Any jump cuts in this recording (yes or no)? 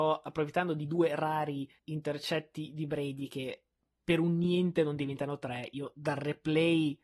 yes